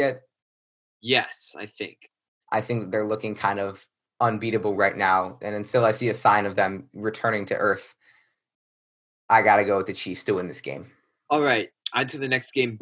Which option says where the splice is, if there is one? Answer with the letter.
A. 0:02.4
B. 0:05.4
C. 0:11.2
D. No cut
A